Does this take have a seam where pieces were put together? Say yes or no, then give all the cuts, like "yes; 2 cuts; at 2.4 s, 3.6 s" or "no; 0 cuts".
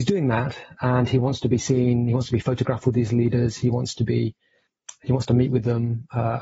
no; 0 cuts